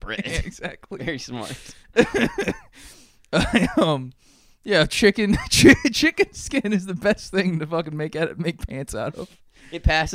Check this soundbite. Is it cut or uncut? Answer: uncut